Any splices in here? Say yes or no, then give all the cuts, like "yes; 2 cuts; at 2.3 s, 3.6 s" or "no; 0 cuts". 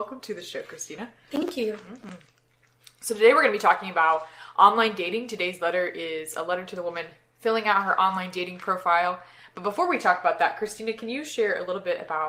no; 0 cuts